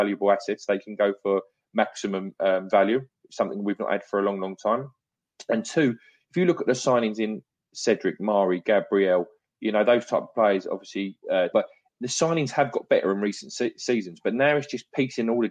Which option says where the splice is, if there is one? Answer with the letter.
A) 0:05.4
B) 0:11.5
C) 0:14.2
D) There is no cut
B